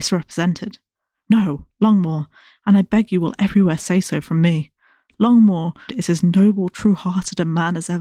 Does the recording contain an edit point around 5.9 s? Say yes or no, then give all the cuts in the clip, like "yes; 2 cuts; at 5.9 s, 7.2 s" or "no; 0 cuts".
yes; 2 cuts; at 1.1 s, 5.9 s